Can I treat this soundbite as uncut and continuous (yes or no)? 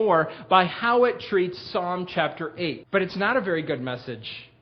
no